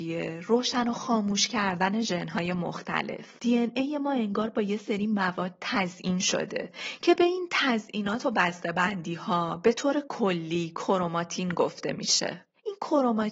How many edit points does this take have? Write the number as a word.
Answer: one